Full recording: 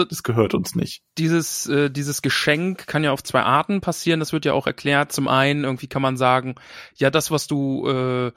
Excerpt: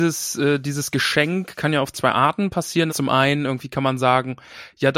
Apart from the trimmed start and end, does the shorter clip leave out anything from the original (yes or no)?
yes